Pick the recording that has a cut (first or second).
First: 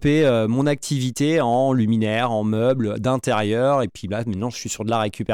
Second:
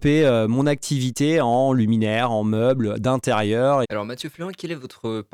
second